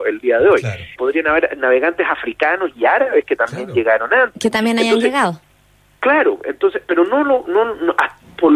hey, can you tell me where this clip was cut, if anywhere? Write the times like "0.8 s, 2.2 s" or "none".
1.0 s